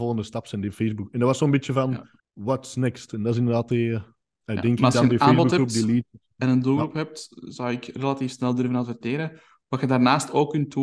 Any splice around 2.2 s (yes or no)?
yes